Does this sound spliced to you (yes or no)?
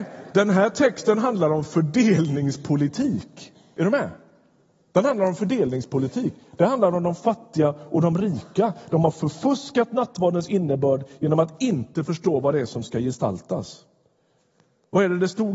no